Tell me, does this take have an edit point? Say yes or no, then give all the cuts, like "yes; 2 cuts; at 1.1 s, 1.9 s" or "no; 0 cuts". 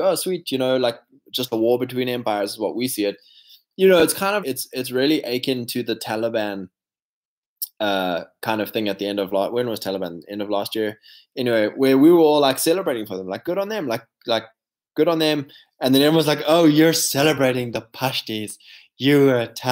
yes; 1 cut; at 4.4 s